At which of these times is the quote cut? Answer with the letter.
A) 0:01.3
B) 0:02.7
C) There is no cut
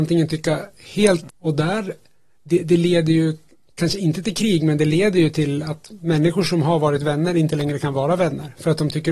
A